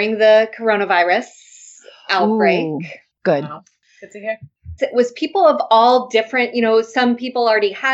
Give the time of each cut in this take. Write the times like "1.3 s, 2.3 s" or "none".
3.2 s, 4.8 s